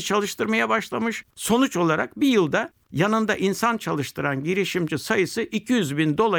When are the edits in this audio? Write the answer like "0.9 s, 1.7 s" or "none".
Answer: 1.3 s